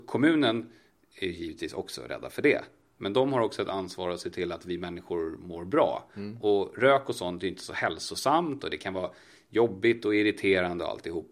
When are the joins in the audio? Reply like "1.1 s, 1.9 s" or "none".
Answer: none